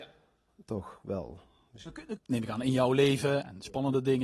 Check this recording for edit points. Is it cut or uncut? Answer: cut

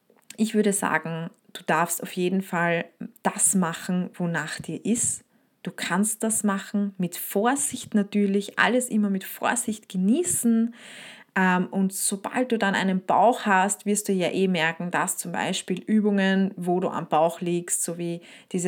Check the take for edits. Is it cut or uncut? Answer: uncut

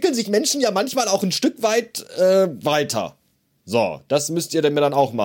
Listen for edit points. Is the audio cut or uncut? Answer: uncut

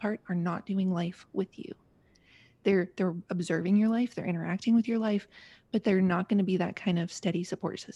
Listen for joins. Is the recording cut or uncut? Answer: uncut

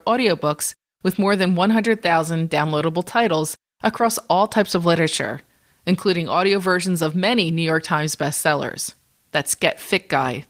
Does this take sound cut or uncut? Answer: cut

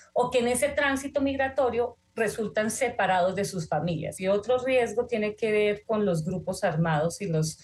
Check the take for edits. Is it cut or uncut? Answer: cut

